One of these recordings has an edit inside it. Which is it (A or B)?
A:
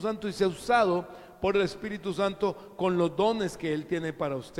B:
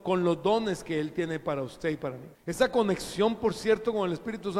B